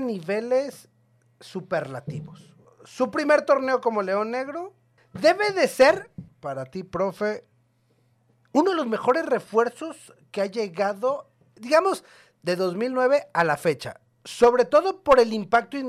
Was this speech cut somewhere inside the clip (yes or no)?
yes